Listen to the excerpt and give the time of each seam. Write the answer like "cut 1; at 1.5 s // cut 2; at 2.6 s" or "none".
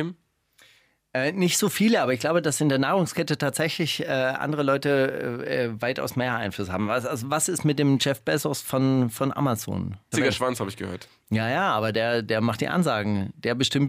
cut 1; at 10.1 s